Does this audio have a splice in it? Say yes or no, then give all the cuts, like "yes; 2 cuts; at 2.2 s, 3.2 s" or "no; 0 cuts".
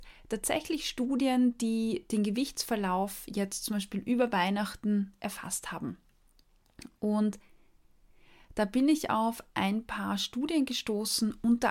no; 0 cuts